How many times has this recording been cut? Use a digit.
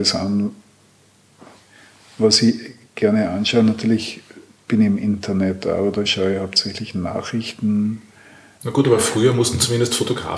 1